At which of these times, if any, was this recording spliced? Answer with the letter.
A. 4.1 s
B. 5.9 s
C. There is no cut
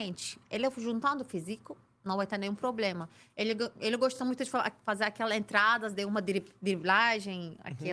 C